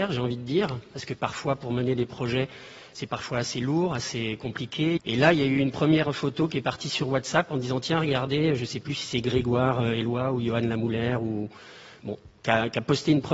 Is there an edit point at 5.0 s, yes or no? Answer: yes